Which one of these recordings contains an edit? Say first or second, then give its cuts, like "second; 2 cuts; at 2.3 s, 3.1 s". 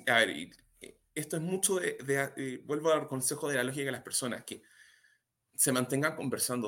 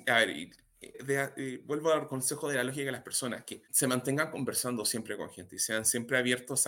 second; 2 cuts; at 0.9 s, 3.7 s